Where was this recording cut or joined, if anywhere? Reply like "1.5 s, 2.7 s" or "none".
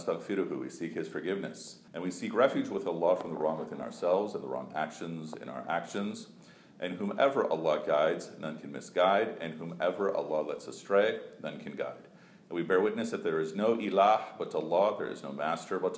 1.9 s